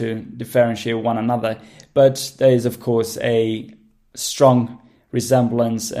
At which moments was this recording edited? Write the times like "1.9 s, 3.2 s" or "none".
none

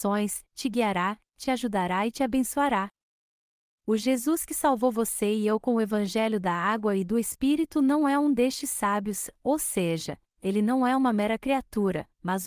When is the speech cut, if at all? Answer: 3.8 s

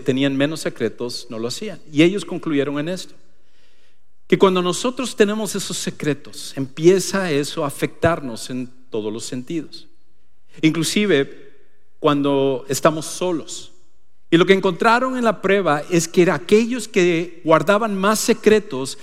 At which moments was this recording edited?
14.3 s

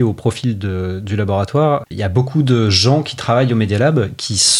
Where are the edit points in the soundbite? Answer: 1.9 s

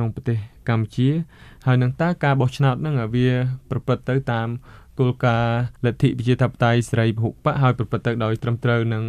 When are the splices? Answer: 5.8 s

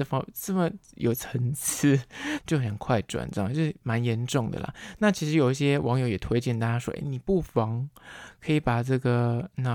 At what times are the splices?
2.4 s

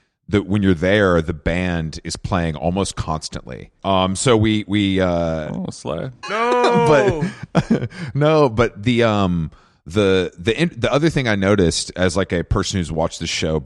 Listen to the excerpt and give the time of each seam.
3.8 s, 6.2 s

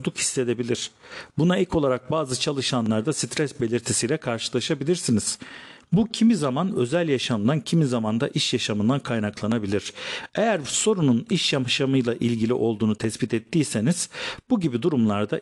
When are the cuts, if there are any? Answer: none

